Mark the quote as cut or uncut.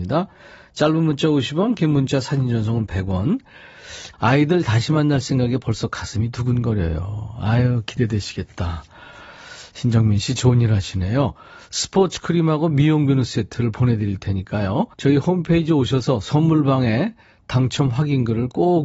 cut